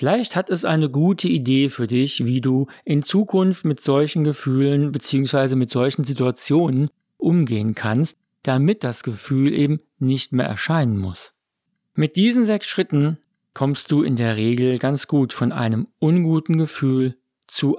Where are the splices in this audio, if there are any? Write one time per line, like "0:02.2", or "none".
none